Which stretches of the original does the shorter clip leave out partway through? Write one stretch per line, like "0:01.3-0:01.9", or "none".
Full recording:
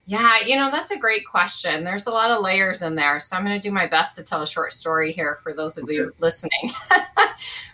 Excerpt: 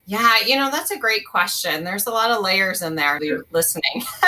0:03.2-0:05.9